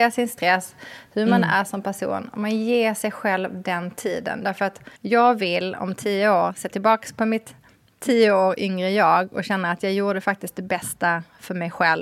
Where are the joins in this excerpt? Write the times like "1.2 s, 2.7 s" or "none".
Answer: 5.0 s